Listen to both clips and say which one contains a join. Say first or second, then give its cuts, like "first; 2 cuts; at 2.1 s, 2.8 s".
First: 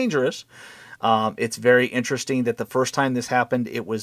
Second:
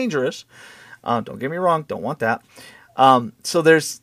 first; 1 cut; at 1.0 s